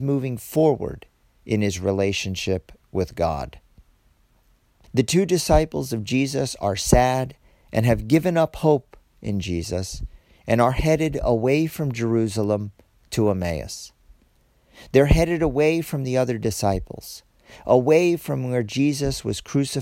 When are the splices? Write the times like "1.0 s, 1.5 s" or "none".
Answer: 4.8 s